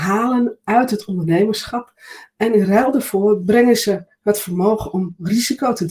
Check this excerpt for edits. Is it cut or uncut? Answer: uncut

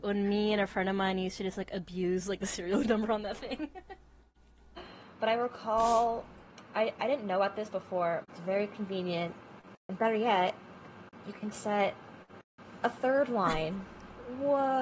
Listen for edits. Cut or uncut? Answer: cut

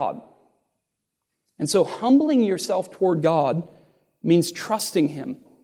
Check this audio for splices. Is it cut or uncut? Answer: uncut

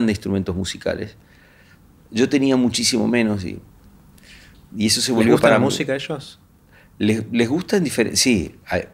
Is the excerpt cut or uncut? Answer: uncut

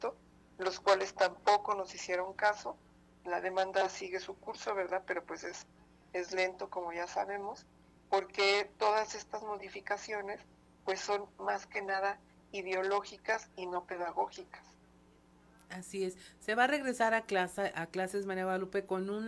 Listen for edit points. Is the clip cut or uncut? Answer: uncut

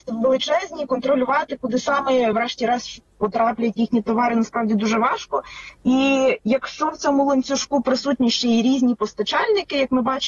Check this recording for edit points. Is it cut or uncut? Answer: uncut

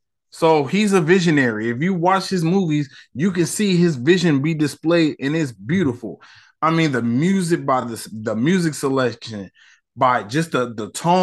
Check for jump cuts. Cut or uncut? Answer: uncut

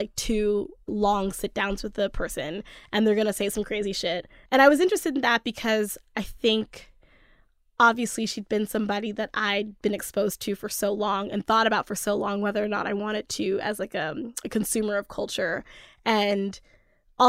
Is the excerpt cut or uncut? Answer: cut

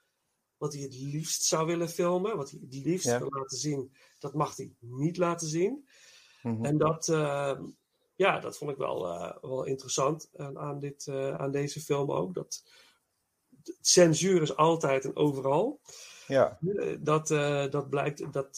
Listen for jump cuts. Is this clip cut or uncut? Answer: uncut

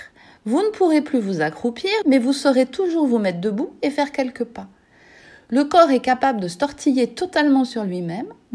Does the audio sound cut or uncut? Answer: cut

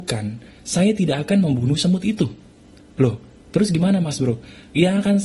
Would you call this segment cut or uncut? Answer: uncut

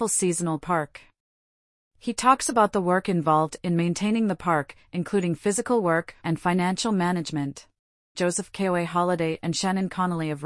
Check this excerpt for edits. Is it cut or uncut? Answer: cut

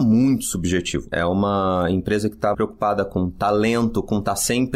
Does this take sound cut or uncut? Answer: cut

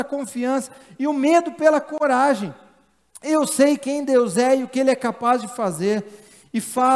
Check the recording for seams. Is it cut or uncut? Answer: uncut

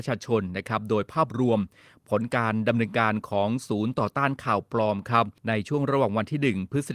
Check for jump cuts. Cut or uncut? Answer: cut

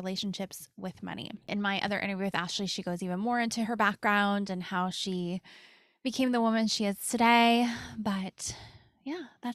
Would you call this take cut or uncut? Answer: uncut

